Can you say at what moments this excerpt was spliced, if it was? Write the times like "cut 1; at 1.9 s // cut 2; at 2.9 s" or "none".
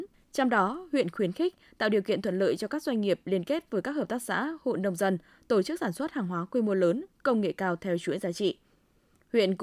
none